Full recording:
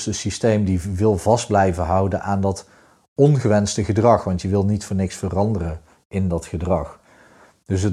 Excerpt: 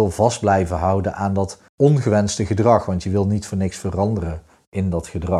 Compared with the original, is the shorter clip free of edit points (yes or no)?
no